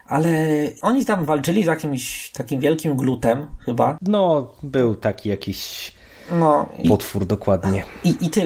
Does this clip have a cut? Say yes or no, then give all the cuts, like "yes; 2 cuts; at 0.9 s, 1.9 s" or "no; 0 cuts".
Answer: yes; 1 cut; at 6.8 s